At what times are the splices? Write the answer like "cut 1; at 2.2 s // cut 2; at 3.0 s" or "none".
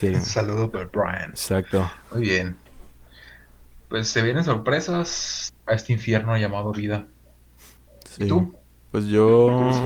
cut 1; at 5.5 s